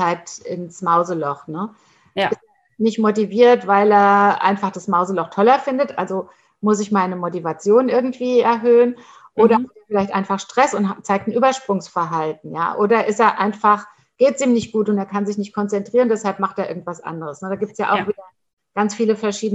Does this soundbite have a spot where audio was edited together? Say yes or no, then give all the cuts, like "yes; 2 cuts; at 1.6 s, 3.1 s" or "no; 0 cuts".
no; 0 cuts